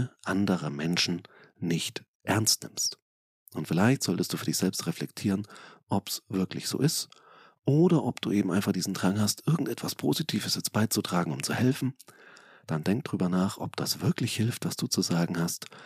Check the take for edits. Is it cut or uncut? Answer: uncut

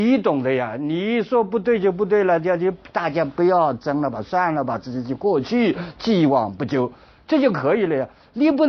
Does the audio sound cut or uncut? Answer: uncut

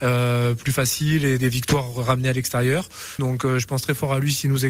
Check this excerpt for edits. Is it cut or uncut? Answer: cut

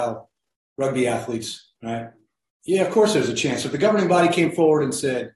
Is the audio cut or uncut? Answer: cut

